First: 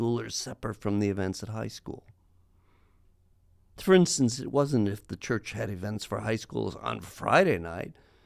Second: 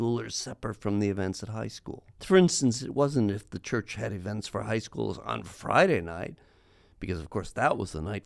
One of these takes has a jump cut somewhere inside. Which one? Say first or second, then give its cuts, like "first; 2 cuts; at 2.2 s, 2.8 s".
second; 1 cut; at 2.1 s